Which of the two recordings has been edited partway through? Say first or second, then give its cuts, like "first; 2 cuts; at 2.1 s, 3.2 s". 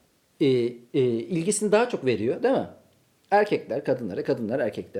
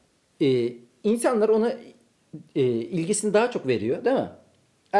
first; 1 cut; at 0.9 s